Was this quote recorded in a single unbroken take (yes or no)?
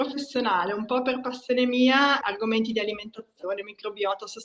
no